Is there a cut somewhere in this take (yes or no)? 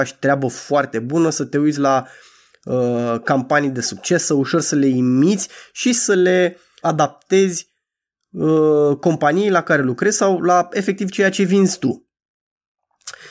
yes